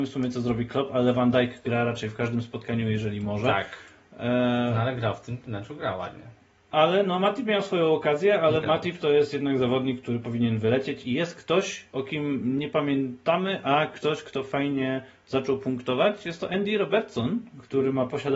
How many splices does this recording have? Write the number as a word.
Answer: one